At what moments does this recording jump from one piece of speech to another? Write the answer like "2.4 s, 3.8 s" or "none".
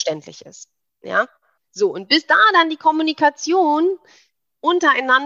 none

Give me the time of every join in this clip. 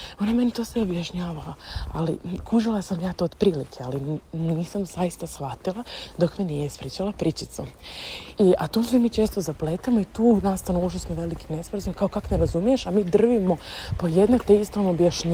8.3 s

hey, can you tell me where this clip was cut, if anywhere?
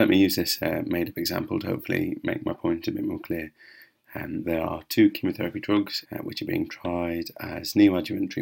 4.4 s, 6.0 s

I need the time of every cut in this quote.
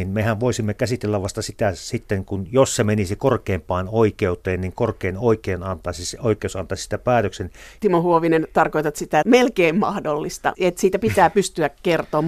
7.8 s, 9.2 s, 10.5 s

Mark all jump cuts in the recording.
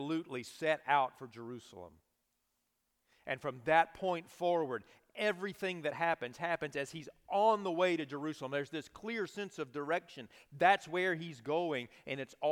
none

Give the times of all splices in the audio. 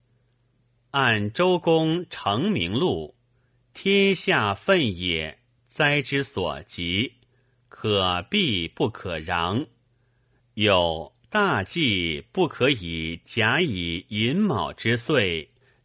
10.4 s

